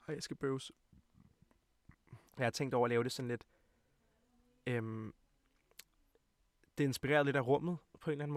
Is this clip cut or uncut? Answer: cut